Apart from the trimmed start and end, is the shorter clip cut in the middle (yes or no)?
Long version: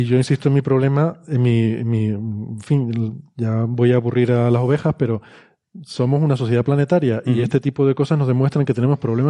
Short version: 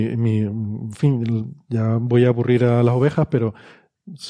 no